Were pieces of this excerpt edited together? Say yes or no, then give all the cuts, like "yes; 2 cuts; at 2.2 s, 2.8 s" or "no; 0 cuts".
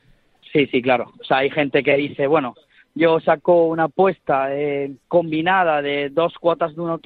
yes; 1 cut; at 5.0 s